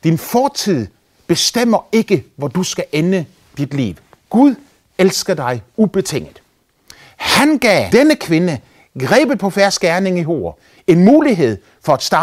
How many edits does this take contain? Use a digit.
1